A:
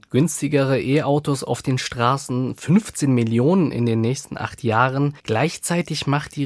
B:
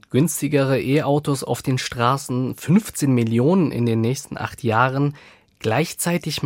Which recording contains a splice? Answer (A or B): A